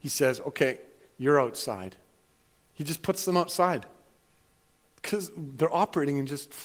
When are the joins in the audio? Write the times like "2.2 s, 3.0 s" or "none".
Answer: none